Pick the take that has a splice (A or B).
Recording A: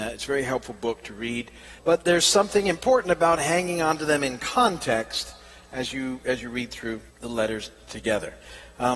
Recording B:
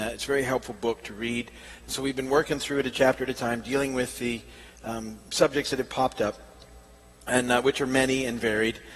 A